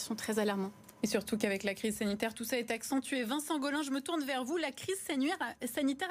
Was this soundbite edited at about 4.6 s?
no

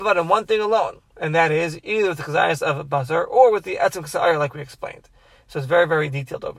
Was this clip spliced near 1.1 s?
no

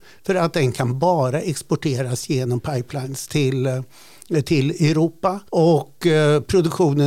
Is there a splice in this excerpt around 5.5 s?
yes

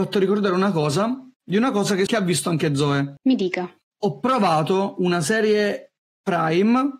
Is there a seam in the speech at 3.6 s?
no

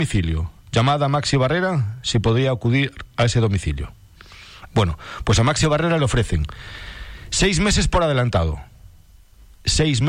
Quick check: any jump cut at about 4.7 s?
yes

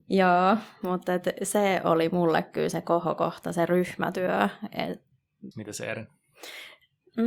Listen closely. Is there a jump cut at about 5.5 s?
yes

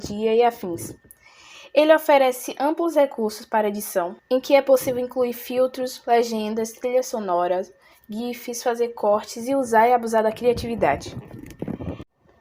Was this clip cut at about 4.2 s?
yes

